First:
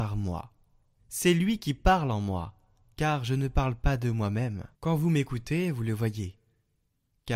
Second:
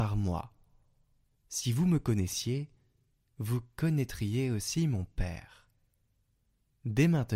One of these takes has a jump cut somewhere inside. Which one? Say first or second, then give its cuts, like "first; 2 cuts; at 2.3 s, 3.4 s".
first; 2 cuts; at 1.0 s, 4.7 s